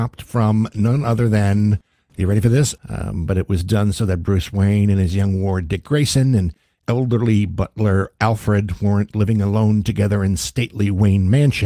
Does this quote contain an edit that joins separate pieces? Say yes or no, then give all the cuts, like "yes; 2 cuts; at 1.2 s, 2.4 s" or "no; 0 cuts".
yes; 1 cut; at 2.8 s